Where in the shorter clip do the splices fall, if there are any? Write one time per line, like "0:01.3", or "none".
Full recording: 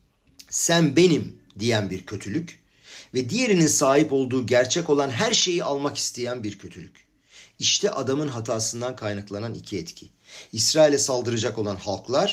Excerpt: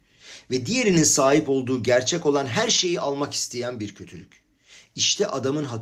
none